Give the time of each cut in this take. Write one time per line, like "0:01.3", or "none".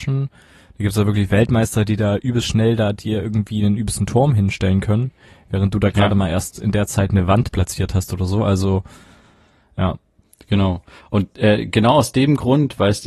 none